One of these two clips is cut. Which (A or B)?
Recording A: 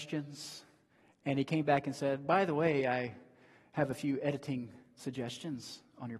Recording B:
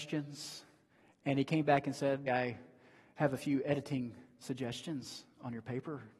B